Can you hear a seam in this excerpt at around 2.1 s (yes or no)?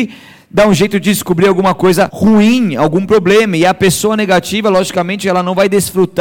yes